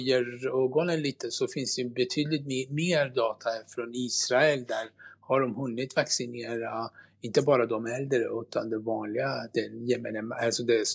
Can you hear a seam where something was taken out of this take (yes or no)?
yes